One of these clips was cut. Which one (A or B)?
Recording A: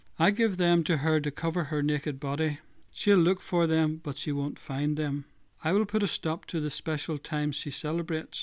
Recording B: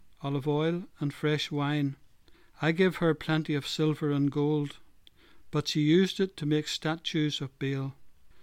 A